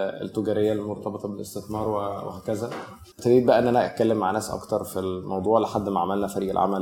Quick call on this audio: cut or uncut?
cut